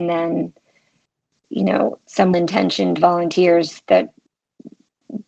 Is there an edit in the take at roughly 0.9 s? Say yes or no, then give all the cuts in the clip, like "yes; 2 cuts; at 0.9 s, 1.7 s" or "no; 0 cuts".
no; 1 cut; at 2.3 s